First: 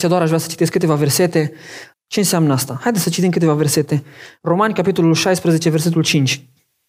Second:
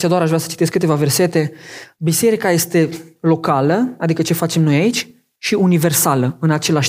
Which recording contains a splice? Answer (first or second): first